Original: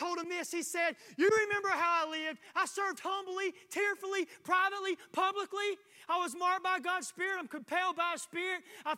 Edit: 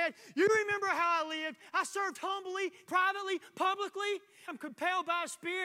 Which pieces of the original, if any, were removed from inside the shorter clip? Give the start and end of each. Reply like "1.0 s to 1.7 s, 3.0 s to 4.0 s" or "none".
3.7 s to 4.4 s, 6.0 s to 7.4 s